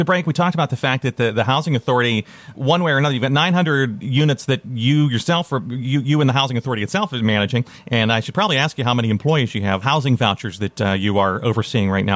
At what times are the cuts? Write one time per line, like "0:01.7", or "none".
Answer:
0:02.5
0:09.8